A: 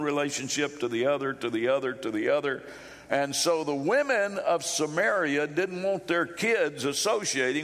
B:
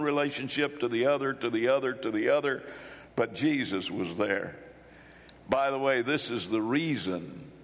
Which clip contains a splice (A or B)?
B